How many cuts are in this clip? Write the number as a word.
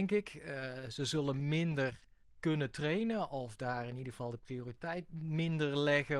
zero